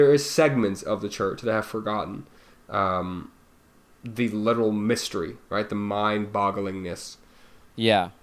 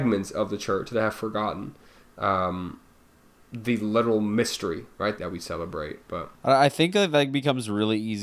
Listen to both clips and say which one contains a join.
second; 2 cuts; at 5.2 s, 6.3 s

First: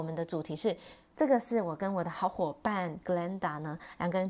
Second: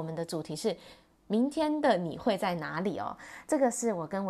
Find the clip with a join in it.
first; 1 cut; at 1.1 s

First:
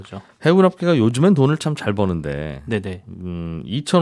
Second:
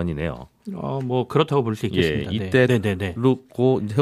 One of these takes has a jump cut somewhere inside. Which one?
second; 1 cut; at 2.7 s

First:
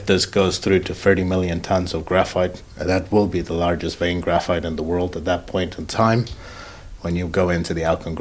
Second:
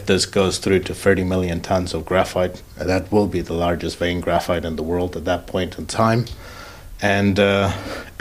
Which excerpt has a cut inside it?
first; 1 cut; at 7.0 s

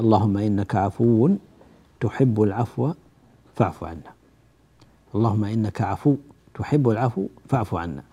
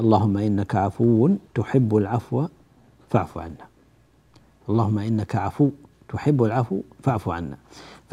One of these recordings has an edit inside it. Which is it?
second; 1 cut; at 1.5 s

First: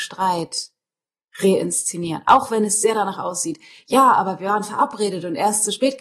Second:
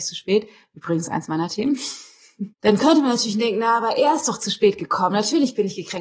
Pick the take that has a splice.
second; 1 cut; at 2.5 s

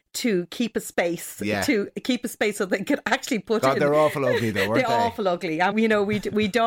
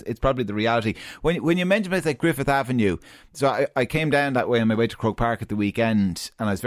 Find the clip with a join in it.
first; 1 cut; at 5.7 s

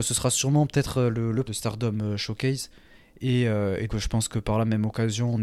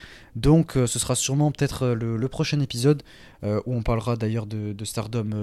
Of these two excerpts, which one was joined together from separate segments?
first; 2 cuts; at 1.5 s, 3.9 s

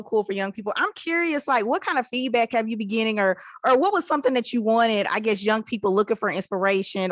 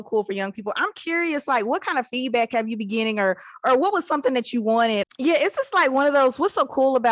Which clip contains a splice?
second; 1 cut; at 5.0 s

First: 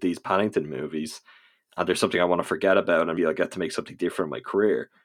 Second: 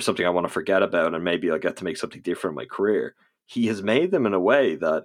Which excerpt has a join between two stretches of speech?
first; 1 cut; at 3.2 s

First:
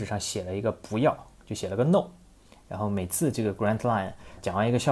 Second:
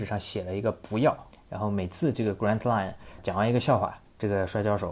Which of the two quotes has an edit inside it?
second; 1 cut; at 1.3 s

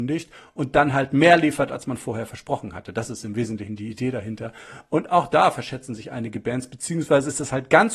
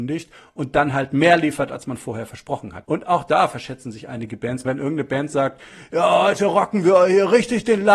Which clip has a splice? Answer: second; 2 cuts; at 2.8 s, 4.6 s

